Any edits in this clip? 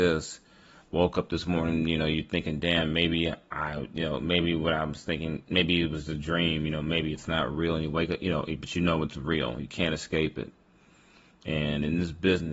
no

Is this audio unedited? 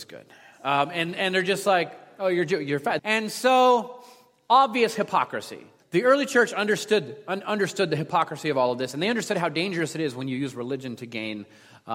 no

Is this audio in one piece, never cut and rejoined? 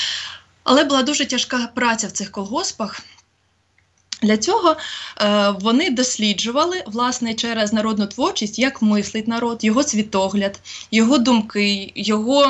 no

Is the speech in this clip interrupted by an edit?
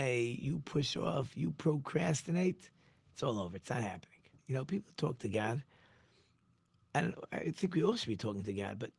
yes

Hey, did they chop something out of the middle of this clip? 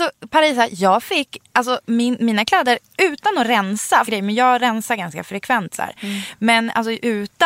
yes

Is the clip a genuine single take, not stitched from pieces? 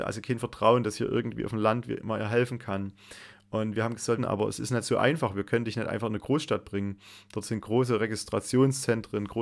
no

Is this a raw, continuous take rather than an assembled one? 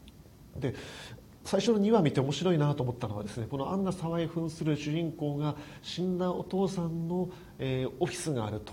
yes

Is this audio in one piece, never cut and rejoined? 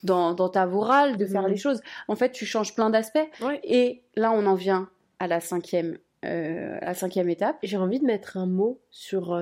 no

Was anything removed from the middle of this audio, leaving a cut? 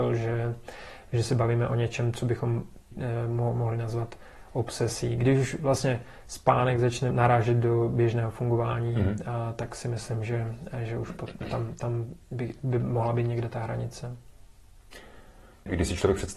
no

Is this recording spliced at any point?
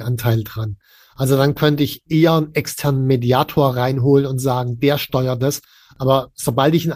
no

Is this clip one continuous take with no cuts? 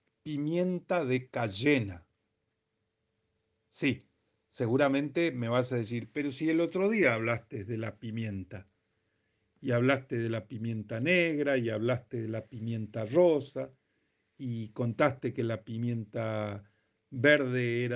yes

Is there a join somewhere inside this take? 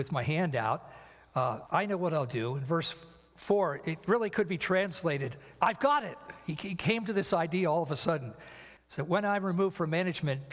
yes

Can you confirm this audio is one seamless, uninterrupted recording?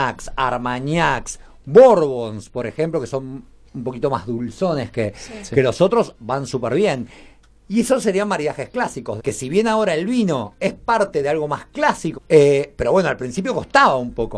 no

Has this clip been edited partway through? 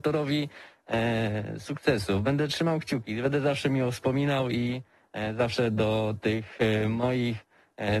no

